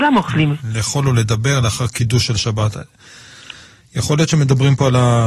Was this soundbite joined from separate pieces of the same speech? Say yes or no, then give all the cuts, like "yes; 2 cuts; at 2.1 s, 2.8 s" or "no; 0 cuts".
no; 0 cuts